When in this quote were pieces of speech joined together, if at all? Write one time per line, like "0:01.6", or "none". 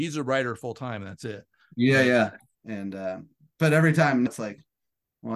0:02.5
0:04.3